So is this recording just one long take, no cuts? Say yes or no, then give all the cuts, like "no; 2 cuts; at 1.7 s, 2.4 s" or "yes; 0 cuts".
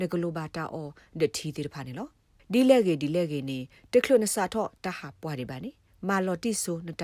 yes; 0 cuts